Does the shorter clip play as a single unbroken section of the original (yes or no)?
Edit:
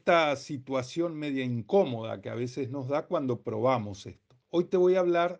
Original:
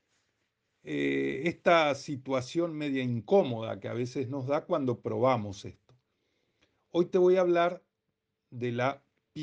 no